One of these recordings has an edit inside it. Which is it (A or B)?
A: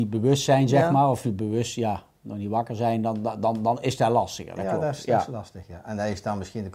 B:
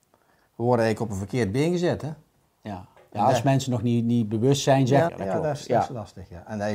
B